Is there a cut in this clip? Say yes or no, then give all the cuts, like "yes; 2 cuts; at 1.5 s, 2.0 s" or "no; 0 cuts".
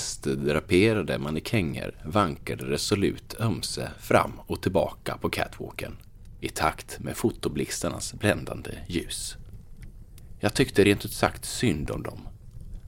no; 0 cuts